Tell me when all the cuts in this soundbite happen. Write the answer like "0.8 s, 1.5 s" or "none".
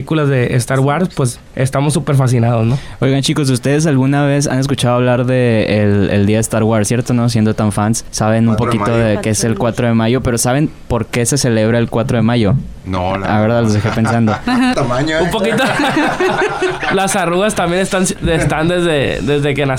14.7 s